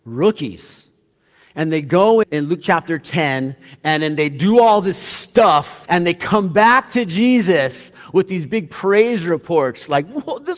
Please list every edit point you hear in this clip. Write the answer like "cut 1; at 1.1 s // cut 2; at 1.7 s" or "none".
cut 1; at 2.2 s // cut 2; at 5.9 s